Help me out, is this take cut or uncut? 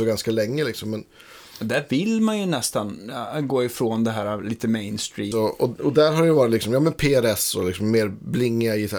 cut